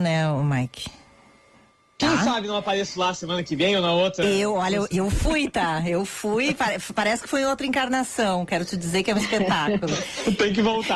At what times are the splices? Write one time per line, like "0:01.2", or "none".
none